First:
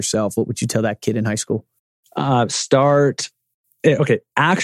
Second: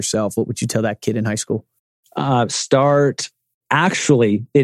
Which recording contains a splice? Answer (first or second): second